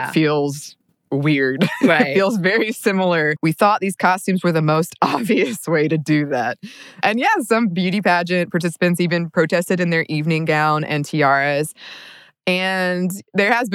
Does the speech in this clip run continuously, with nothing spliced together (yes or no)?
no